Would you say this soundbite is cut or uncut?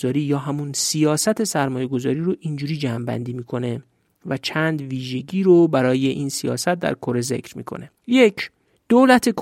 cut